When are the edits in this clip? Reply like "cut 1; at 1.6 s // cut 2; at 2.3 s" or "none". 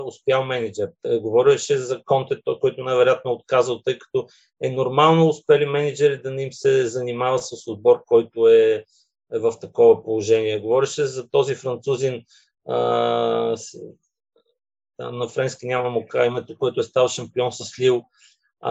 none